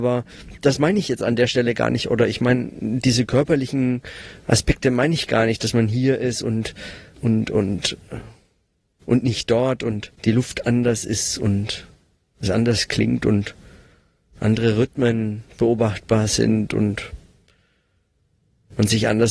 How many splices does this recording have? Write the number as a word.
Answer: two